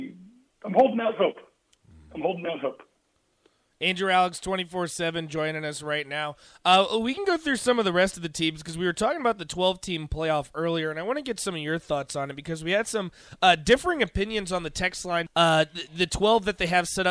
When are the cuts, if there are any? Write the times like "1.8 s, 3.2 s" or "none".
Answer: 15.3 s